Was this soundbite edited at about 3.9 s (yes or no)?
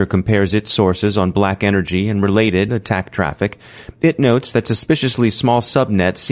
no